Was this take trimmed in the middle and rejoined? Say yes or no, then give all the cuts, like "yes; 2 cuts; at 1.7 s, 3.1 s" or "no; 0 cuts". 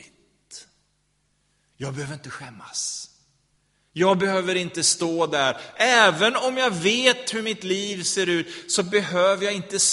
no; 0 cuts